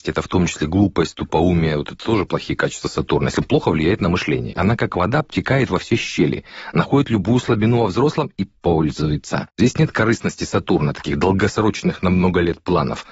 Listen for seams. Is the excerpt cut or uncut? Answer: cut